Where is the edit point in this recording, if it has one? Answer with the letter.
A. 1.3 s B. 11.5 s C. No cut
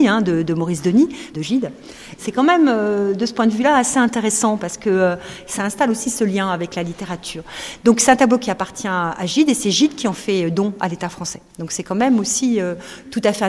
A